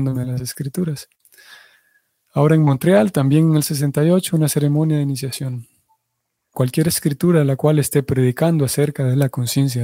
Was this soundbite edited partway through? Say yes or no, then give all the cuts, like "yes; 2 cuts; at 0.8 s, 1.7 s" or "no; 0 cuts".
yes; 1 cut; at 6.5 s